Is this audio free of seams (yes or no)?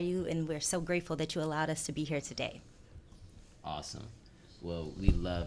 yes